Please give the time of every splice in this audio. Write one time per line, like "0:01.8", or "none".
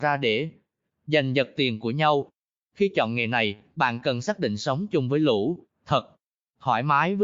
none